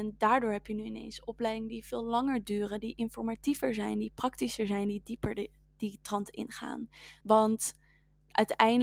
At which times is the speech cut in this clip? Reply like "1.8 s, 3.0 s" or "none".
7.2 s

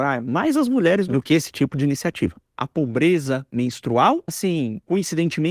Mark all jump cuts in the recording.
2.4 s, 4.3 s

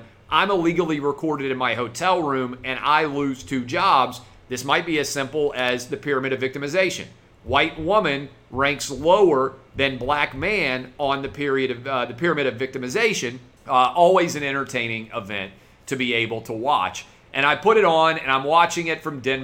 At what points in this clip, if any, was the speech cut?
13.6 s

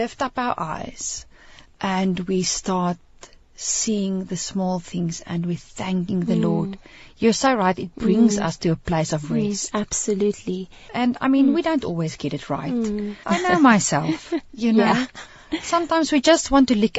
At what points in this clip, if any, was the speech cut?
10.9 s, 13.2 s

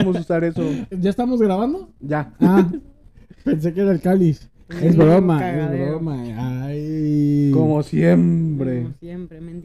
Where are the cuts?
0.9 s

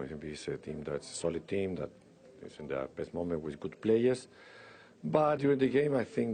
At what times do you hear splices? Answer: 5.4 s

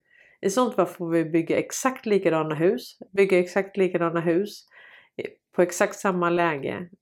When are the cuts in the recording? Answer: 3.1 s

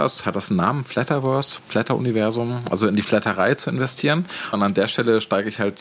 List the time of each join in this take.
1.6 s, 4.5 s

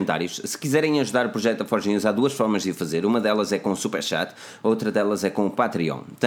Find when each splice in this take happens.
none

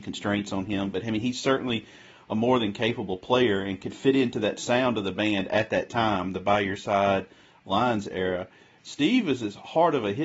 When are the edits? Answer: 8.8 s

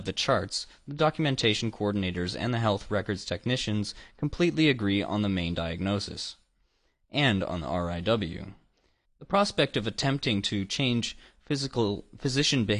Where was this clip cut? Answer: 9.0 s

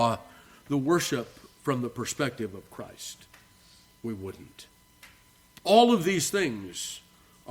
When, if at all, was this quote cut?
5.6 s

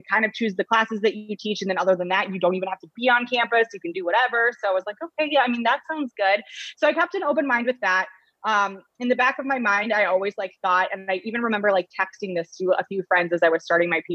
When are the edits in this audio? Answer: none

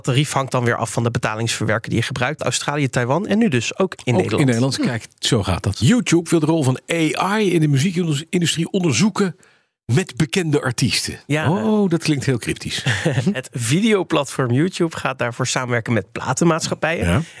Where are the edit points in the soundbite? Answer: 2.4 s

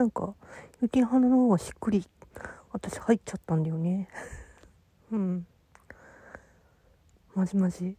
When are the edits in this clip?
none

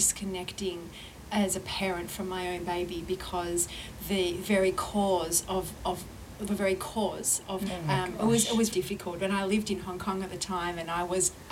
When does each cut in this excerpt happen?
7.7 s, 8.7 s

